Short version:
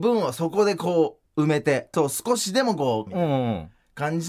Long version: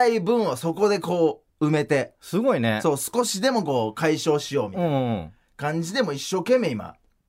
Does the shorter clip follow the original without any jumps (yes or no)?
no